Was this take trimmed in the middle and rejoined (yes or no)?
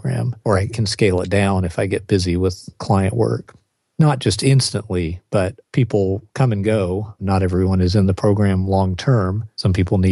no